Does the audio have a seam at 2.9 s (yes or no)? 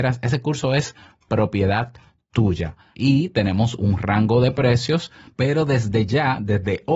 yes